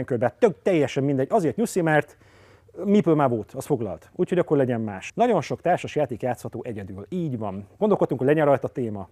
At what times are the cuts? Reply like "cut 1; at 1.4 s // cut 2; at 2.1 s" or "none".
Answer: cut 1; at 5.1 s // cut 2; at 7.8 s